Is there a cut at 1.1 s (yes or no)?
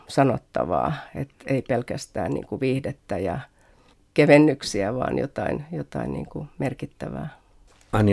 no